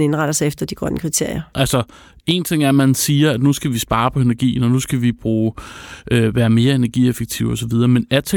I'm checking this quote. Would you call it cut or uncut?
cut